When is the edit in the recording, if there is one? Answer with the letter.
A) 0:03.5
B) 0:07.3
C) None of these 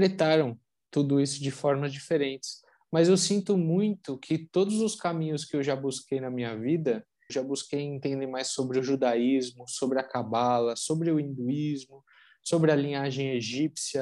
B